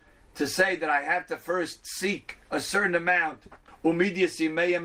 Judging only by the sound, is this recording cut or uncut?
cut